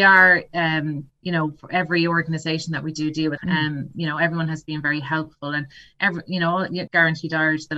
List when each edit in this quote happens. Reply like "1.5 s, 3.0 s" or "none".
3.4 s, 6.9 s